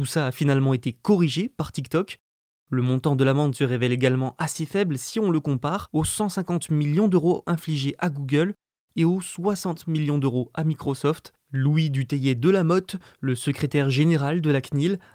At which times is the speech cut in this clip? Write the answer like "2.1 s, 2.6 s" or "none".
none

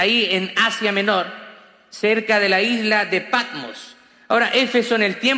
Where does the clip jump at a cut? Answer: none

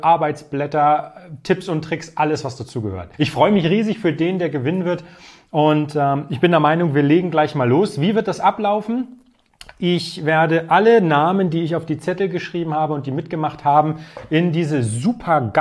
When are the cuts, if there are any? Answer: 3.1 s

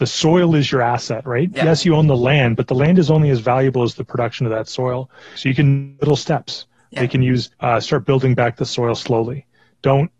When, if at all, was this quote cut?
5.4 s, 7.5 s

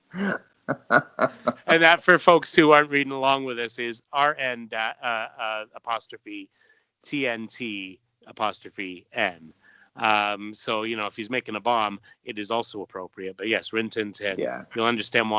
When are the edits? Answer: none

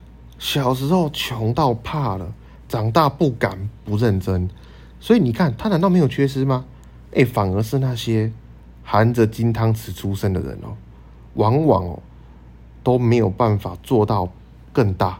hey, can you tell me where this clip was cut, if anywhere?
none

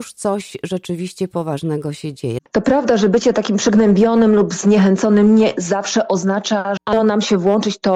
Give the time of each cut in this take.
2.4 s, 6.8 s

